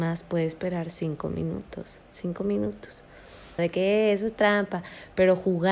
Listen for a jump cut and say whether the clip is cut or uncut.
cut